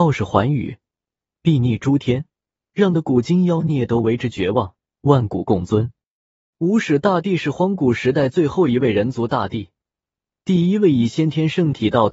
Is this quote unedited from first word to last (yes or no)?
no